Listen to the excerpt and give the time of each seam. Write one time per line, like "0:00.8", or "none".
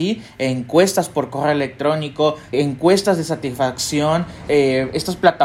0:02.5
0:04.5